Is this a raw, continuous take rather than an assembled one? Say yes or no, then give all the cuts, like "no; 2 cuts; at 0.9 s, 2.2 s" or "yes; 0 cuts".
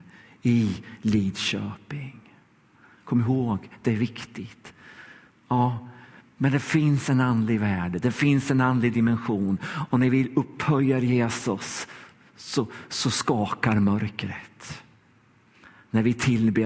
no; 1 cut; at 5.3 s